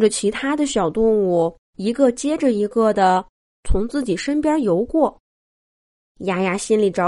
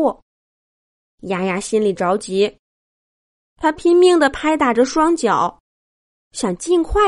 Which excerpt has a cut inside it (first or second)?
first